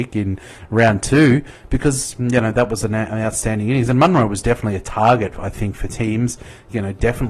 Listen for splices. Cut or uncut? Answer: uncut